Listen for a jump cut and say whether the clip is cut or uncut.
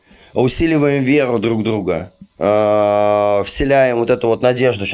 uncut